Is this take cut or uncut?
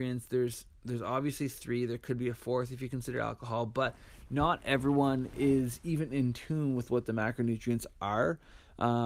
uncut